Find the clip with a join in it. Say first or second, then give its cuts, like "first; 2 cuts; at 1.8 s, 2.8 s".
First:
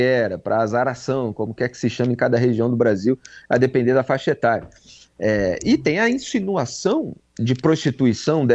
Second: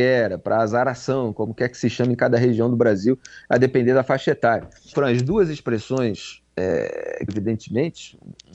second; 2 cuts; at 4.9 s, 7.3 s